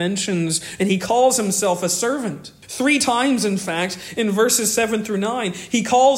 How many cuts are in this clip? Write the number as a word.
one